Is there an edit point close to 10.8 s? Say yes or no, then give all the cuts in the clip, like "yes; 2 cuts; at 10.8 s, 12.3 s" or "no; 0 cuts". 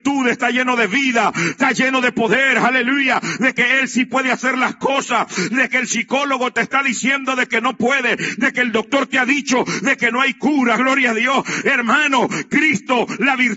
no; 0 cuts